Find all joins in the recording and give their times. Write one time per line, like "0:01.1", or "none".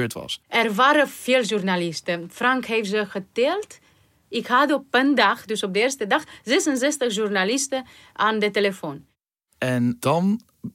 none